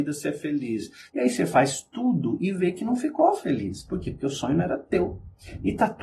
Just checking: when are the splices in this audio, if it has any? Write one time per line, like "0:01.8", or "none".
0:01.1